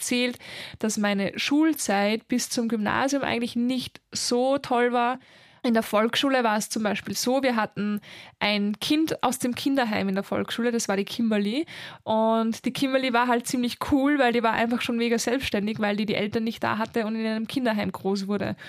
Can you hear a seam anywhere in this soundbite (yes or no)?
no